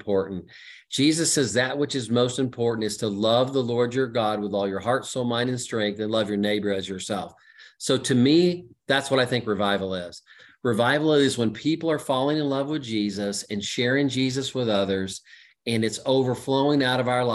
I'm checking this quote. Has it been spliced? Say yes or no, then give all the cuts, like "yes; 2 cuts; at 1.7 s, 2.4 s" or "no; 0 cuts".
no; 0 cuts